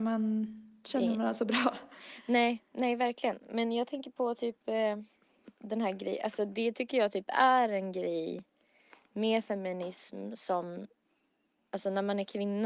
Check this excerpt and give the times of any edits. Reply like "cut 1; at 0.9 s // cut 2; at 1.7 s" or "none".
none